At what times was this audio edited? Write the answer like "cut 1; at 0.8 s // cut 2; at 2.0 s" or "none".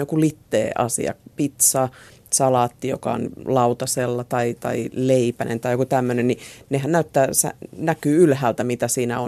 none